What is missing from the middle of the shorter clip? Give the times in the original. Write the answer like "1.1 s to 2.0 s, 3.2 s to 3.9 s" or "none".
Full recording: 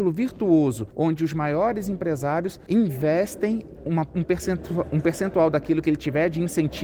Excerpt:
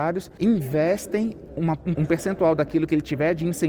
4.2 s to 4.9 s